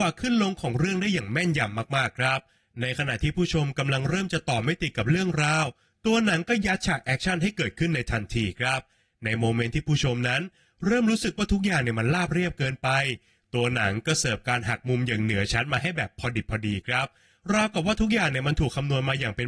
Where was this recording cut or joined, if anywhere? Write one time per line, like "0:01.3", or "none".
none